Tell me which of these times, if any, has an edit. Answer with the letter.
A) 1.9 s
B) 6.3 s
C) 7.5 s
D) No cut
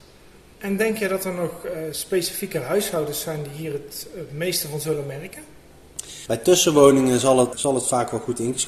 C